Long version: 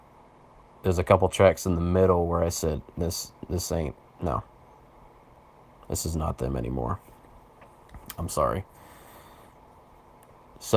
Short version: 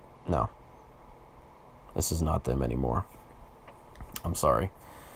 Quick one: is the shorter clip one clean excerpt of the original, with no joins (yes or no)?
yes